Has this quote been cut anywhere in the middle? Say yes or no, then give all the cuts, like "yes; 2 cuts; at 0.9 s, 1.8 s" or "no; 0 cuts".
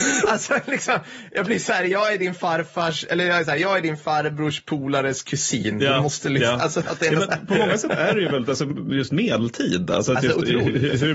no; 0 cuts